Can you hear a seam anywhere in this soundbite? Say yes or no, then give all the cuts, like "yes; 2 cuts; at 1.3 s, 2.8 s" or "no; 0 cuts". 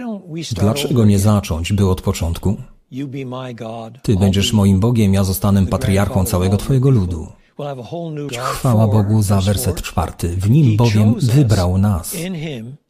yes; 1 cut; at 8.3 s